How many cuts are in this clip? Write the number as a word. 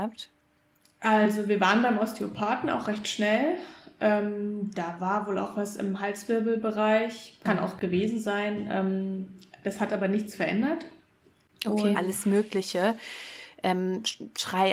one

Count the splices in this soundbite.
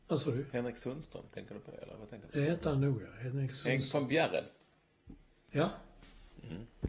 zero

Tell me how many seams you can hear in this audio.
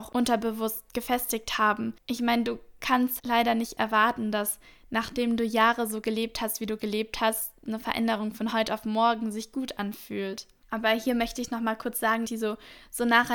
three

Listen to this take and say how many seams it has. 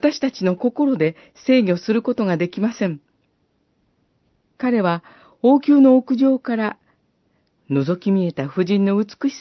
one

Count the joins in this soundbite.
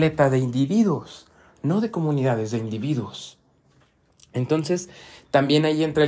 zero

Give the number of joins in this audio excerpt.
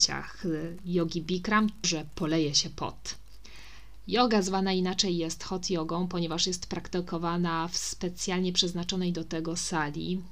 one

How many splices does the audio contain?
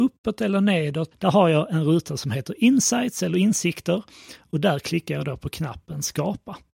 one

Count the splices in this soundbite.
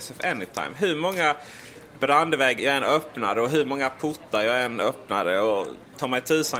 one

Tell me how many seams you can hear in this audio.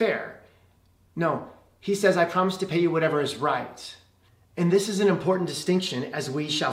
zero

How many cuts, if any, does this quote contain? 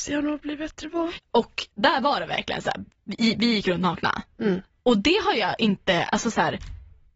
one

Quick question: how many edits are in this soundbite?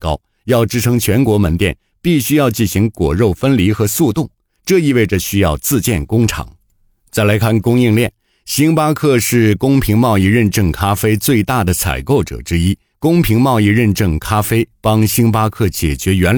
zero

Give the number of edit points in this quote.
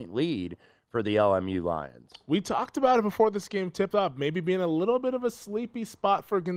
zero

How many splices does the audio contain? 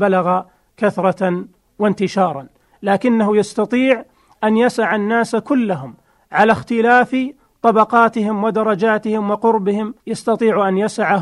one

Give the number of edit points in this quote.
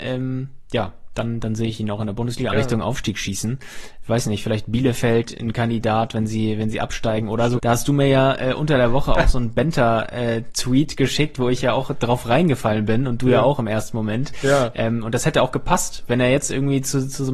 two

